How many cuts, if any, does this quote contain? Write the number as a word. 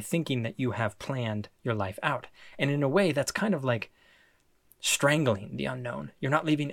zero